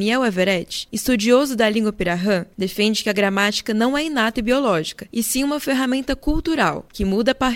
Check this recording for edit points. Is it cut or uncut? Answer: uncut